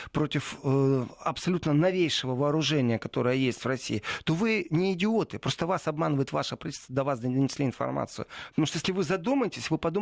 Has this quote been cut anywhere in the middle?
no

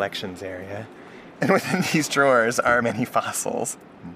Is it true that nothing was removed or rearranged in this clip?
no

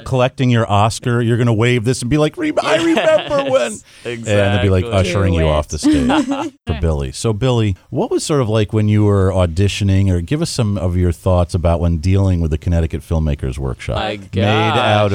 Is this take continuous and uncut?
no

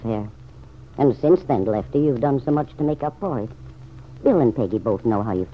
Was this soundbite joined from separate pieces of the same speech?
no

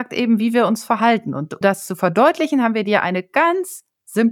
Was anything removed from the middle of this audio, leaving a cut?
yes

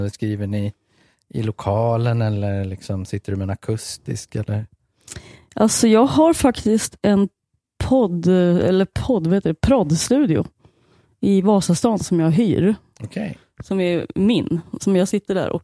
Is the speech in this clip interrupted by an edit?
no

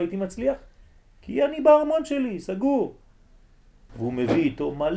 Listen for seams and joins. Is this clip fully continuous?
no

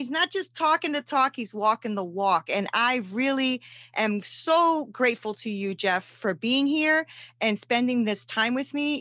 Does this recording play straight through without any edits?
yes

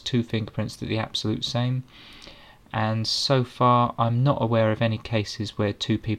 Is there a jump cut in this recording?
no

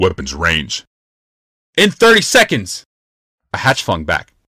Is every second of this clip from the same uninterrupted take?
no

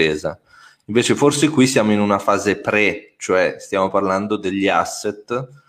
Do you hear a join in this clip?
no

